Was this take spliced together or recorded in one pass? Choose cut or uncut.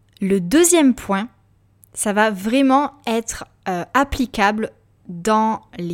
uncut